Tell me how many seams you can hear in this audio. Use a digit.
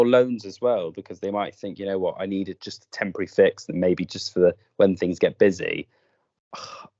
0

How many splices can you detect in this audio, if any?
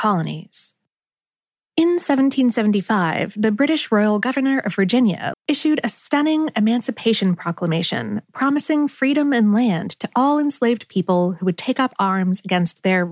1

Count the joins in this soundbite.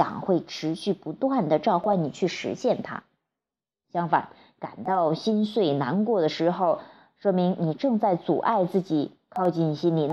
1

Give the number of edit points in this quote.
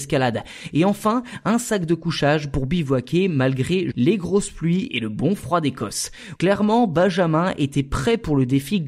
2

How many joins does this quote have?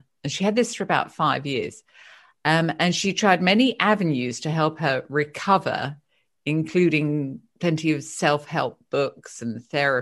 0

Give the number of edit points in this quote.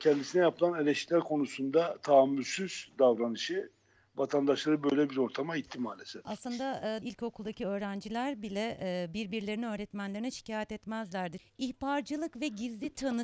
2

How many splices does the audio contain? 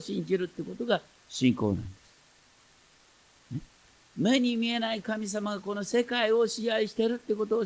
0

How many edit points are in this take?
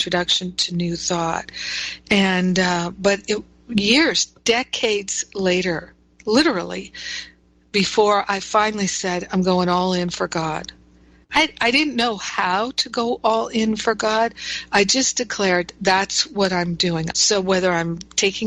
1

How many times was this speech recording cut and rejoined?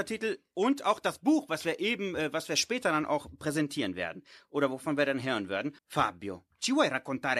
1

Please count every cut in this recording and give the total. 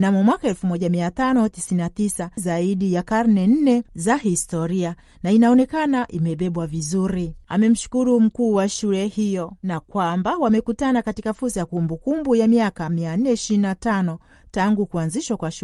1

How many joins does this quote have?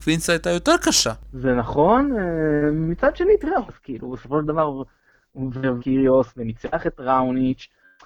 2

